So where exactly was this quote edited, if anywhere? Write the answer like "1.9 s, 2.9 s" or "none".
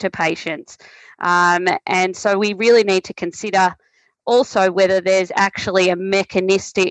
none